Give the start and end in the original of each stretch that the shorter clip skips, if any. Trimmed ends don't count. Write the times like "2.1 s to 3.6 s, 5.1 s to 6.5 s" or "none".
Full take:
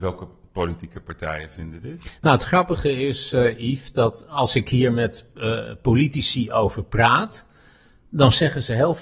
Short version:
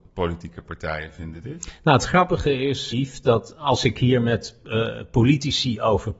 3.3 s to 3.6 s

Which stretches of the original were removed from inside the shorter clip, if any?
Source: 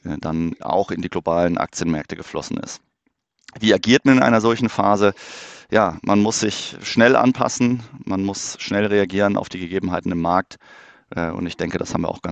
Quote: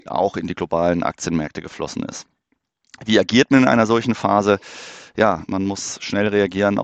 6.0 s to 8.0 s

